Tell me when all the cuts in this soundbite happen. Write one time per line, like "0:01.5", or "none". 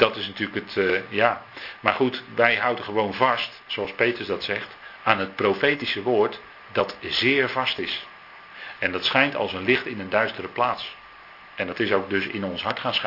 none